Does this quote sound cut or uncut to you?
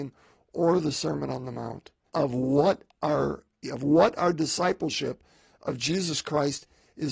cut